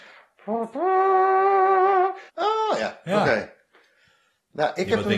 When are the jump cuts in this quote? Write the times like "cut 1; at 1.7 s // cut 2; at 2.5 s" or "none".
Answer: cut 1; at 2.3 s